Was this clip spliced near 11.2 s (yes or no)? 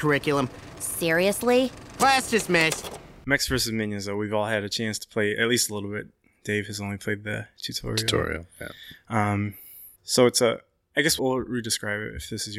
yes